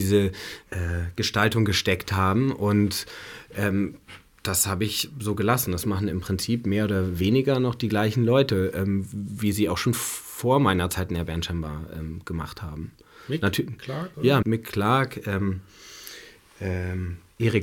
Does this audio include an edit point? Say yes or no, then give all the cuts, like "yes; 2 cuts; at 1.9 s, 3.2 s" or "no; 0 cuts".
yes; 1 cut; at 14.4 s